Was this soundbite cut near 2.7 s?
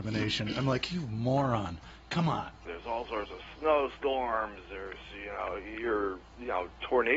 yes; 1 cut; at 2.7 s

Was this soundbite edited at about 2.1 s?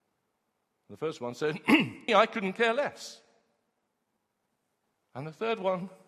yes; 2 cuts; at 2.1 s, 3.9 s

